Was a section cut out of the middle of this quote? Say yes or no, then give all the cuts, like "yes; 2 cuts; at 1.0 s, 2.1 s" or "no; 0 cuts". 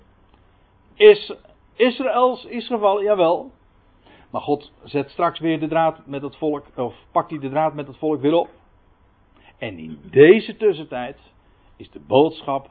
no; 0 cuts